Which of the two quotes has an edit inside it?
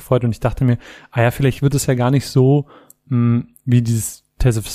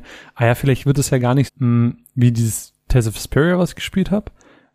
second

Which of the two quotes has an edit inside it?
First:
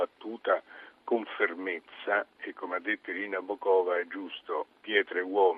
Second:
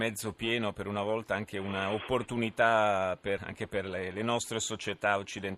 second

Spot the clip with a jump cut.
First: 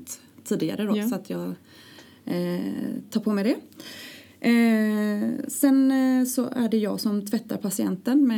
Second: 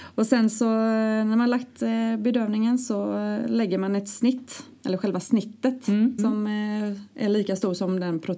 second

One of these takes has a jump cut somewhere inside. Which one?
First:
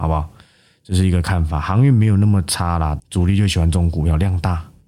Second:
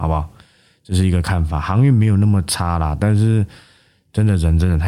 first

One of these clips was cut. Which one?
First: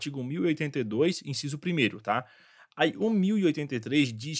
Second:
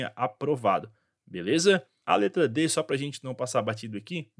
second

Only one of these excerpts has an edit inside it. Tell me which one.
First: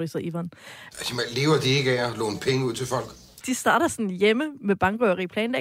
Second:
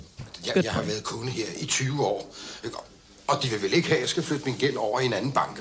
first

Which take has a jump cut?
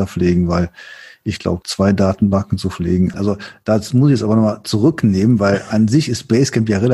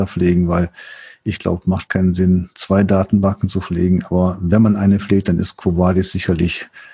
first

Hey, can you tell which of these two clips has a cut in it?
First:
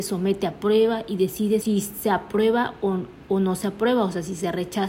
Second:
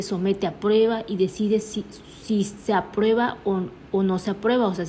first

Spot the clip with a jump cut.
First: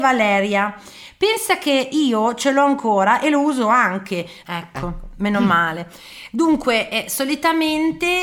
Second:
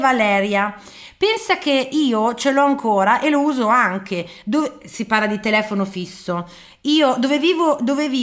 first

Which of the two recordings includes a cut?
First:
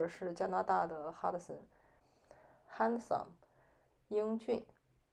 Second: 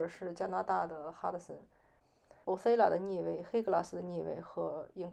second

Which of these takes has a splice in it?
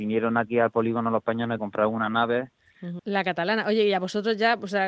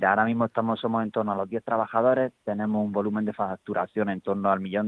first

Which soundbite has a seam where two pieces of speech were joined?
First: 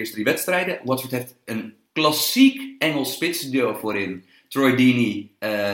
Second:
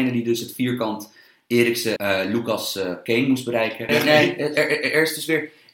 second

